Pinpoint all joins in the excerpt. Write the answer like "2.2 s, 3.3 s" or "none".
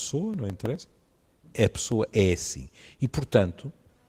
none